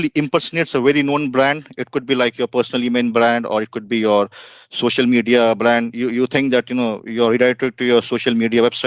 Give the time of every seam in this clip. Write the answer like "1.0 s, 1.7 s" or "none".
none